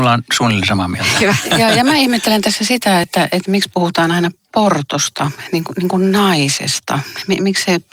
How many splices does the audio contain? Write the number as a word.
zero